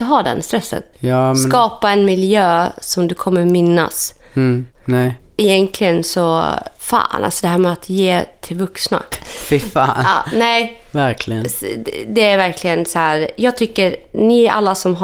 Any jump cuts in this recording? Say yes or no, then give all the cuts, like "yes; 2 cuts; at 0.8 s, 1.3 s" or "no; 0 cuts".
yes; 3 cuts; at 0.9 s, 4.7 s, 9.1 s